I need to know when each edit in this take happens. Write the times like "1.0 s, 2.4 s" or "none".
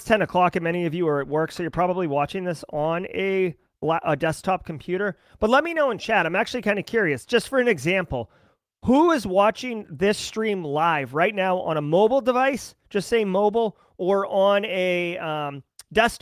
none